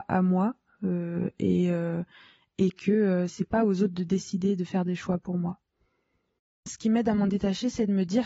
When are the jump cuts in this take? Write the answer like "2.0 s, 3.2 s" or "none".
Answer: 3.3 s, 6.5 s